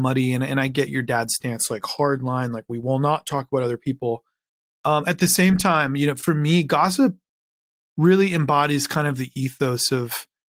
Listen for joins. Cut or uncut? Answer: uncut